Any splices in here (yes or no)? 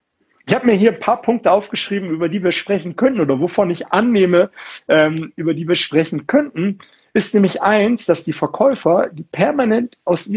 no